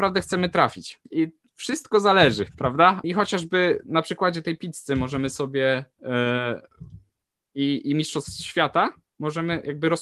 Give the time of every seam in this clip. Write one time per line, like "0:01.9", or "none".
0:01.0
0:03.0